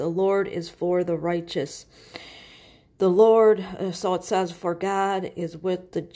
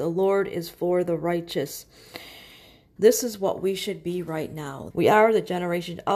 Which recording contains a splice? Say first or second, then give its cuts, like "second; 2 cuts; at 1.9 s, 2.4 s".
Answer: second; 2 cuts; at 3.0 s, 4.9 s